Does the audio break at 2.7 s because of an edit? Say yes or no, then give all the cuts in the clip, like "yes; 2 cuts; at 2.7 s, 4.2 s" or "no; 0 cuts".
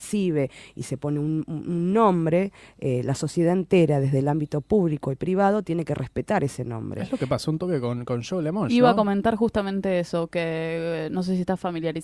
no; 0 cuts